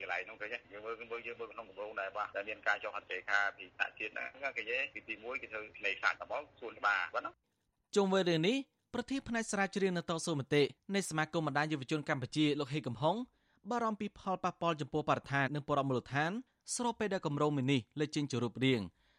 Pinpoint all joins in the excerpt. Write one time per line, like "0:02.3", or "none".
0:15.5